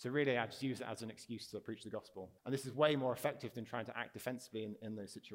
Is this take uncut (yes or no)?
no